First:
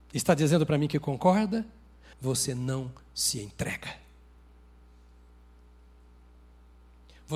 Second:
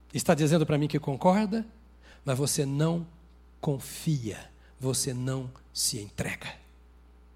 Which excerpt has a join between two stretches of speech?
first; 1 cut; at 2.1 s

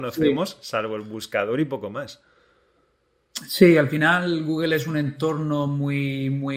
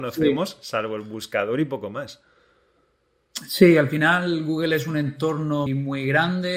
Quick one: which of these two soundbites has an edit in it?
second; 1 cut; at 5.7 s

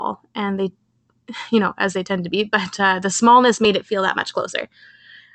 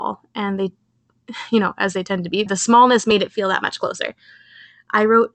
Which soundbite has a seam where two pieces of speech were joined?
second; 1 cut; at 2.5 s

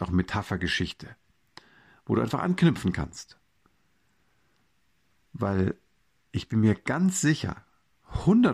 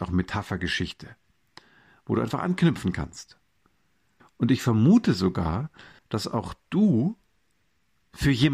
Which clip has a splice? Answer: second; 2 cuts; at 4.2 s, 6.0 s

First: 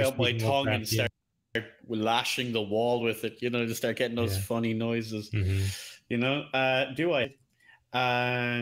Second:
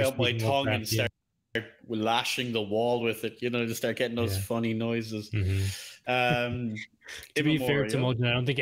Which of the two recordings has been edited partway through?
second; 1 cut; at 6.0 s

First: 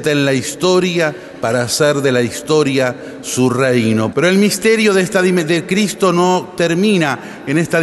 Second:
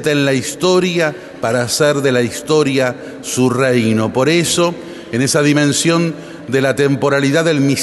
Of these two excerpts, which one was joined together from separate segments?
first; 1 cut; at 4.1 s

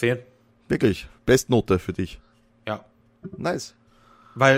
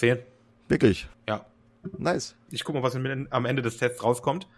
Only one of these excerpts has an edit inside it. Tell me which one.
second; 2 cuts; at 1.1 s, 2.5 s

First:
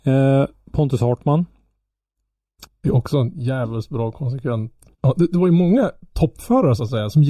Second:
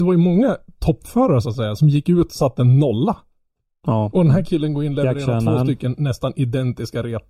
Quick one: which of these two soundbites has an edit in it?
first; 2 cuts; at 2.7 s, 4.9 s

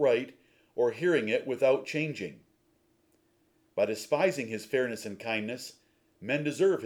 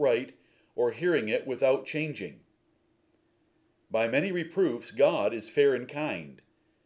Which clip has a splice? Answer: first; 1 cut; at 3.7 s

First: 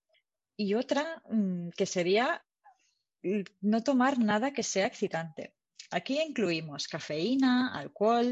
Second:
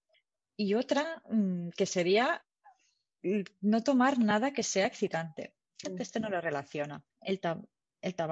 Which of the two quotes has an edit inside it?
second; 2 cuts; at 5.8 s, 7.1 s

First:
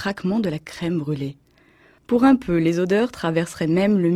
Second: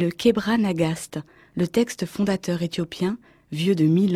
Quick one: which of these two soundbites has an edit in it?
first; 1 cut; at 2.0 s

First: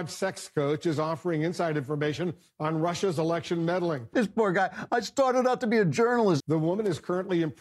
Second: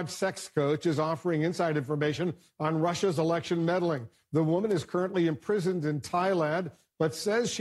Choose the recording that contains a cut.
first; 2 cuts; at 4.1 s, 6.4 s

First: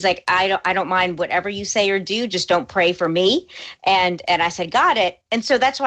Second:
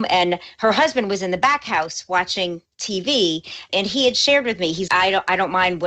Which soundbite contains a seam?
second; 2 cuts; at 3.7 s, 4.9 s

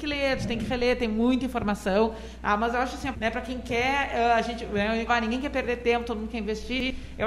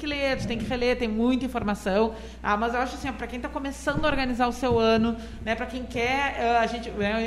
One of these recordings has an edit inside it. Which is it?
first; 2 cuts; at 3.1 s, 5.1 s

